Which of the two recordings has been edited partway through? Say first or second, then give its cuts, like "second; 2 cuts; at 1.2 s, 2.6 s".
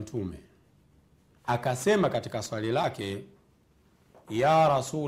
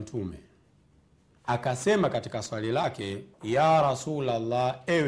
second; 1 cut; at 3.3 s